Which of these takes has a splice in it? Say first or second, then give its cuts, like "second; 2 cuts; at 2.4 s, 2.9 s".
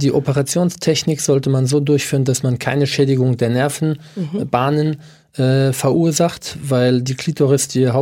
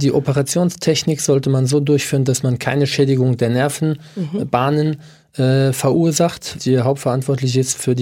second; 1 cut; at 6.6 s